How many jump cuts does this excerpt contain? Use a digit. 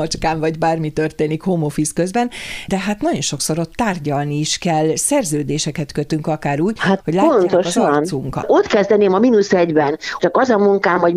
2